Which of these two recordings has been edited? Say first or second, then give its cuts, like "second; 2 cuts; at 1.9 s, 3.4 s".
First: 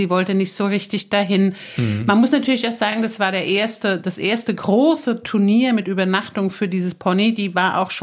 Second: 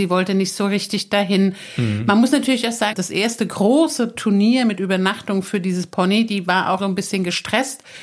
second; 2 cuts; at 2.9 s, 6.8 s